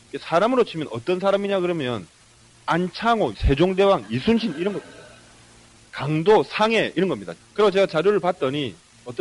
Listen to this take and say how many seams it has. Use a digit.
3